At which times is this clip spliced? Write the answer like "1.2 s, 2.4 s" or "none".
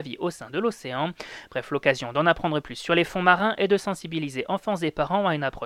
none

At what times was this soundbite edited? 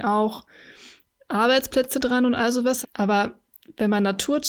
2.8 s

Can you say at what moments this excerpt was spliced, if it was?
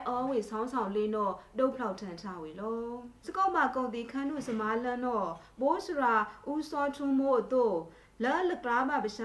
3.2 s

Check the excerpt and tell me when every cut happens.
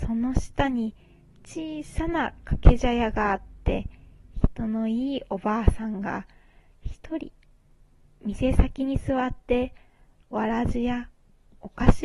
none

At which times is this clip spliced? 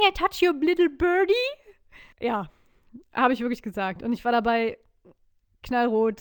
2.1 s

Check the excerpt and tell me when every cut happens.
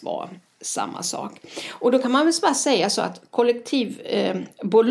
none

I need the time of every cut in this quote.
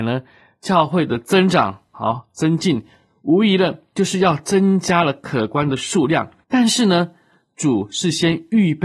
6.4 s

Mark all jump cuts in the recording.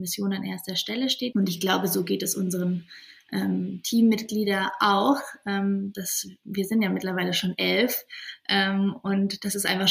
1.3 s

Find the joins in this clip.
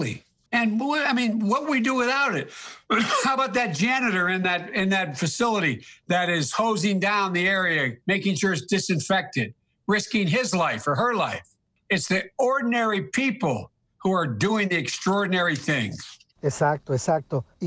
8.0 s

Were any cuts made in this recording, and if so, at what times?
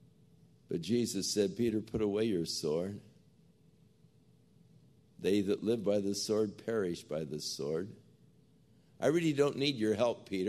none

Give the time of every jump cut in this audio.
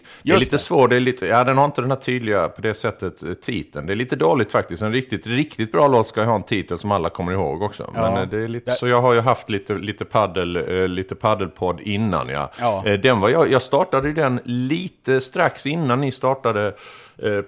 8.7 s

